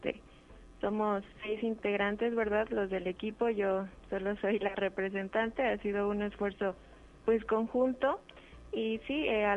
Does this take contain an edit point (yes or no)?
yes